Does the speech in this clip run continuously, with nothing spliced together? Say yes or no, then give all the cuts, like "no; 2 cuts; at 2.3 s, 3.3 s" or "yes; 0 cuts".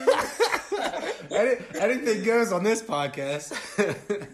yes; 0 cuts